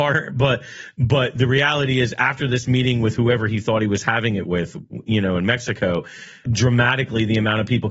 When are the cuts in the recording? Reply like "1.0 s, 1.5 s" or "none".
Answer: 6.4 s